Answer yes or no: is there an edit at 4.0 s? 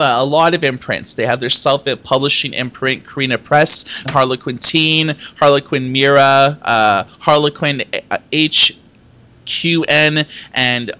yes